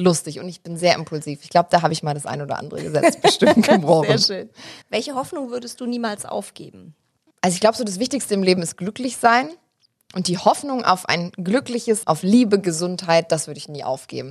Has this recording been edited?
yes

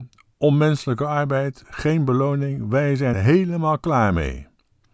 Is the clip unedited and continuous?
no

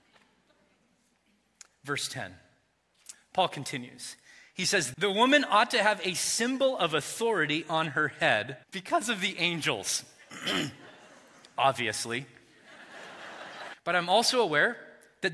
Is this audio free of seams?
no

